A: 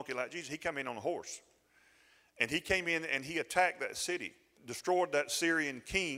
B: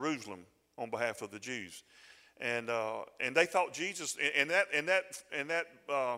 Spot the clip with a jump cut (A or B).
A